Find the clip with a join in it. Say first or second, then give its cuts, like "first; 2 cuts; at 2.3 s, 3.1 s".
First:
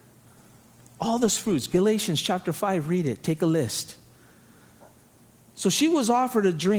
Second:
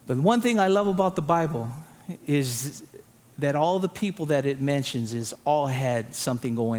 second; 1 cut; at 5.3 s